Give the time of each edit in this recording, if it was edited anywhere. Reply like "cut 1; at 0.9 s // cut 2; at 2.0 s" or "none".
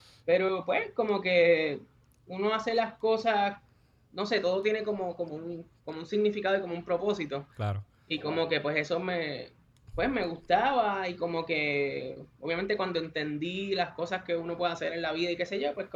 none